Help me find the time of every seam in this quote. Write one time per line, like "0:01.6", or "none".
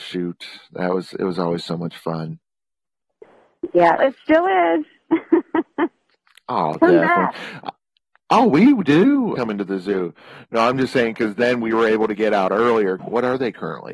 0:04.0
0:09.4
0:13.0